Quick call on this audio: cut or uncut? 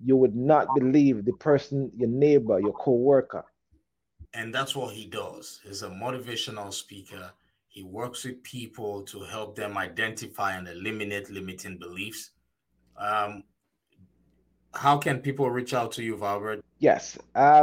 cut